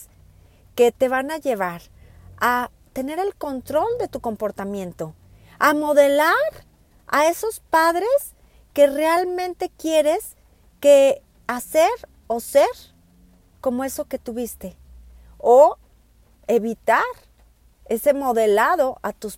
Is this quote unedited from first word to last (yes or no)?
yes